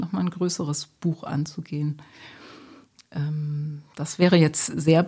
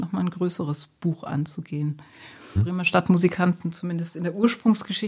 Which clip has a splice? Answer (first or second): second